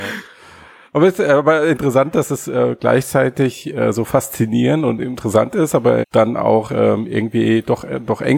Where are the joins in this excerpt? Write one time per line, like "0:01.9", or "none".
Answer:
0:06.0